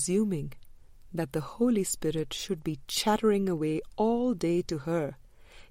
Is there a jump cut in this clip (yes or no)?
no